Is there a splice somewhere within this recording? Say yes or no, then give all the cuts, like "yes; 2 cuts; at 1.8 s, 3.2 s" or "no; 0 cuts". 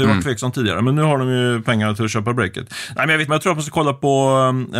yes; 1 cut; at 3.3 s